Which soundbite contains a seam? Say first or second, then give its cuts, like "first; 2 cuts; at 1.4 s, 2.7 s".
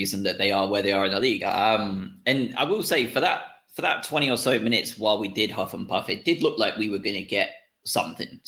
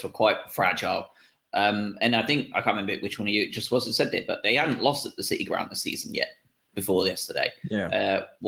first; 1 cut; at 1.4 s